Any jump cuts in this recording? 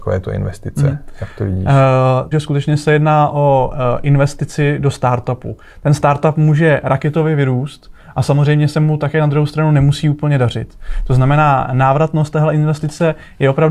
yes; 1 cut; at 2.3 s

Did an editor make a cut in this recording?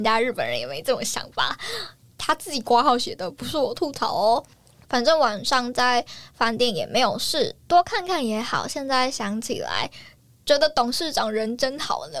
yes; 1 cut; at 4.9 s

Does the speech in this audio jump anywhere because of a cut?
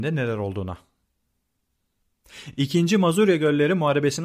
no; 0 cuts

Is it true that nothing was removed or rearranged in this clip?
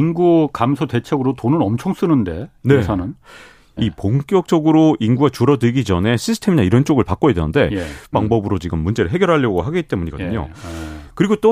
no; 2 cuts; at 3.8 s, 8.1 s

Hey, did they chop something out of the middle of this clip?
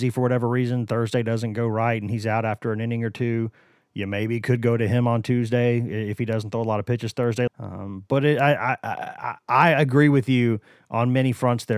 yes; 1 cut; at 7.5 s

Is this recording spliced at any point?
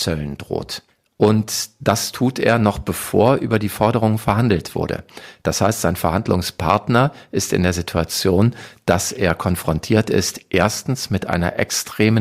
no; 0 cuts

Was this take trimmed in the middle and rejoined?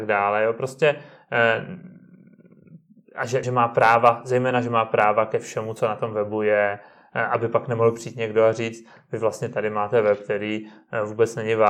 yes; 1 cut; at 3.4 s

